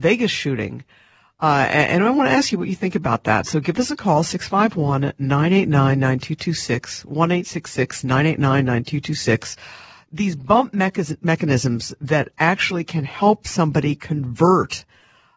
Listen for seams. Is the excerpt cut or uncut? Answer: uncut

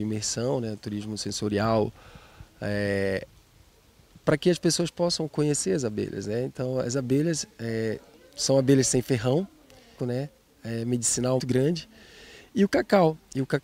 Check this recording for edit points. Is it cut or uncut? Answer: cut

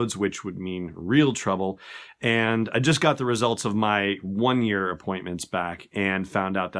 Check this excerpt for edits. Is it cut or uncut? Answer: uncut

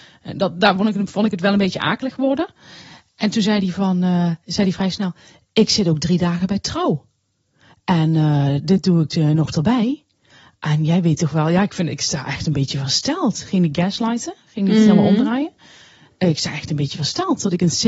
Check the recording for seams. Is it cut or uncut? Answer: cut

